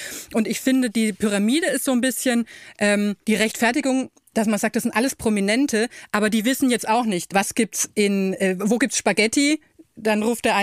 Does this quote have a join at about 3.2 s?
yes; 2 cuts; at 3.2 s, 7.3 s

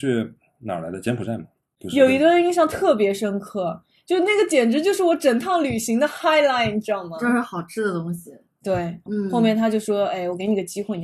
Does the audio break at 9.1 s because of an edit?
yes; 1 cut; at 9.1 s

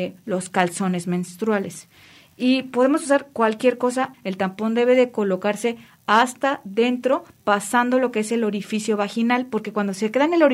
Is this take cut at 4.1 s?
yes; 1 cut; at 4.1 s

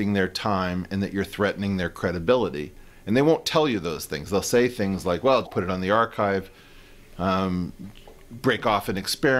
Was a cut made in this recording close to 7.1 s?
no; 1 cut; at 5.4 s

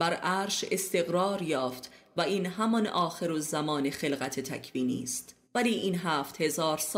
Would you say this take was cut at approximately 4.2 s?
no; 1 cut; at 5.4 s

